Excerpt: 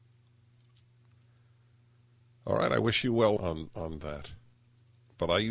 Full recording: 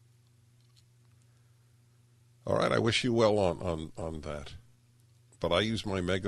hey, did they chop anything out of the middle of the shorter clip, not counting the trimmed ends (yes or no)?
yes